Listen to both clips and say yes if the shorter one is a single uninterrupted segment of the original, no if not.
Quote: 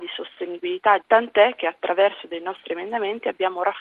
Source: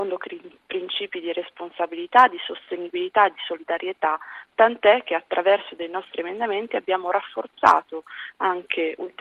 no